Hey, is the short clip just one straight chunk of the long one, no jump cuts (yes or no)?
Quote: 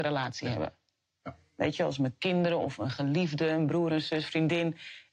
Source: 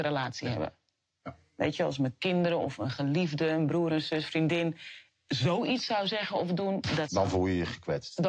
yes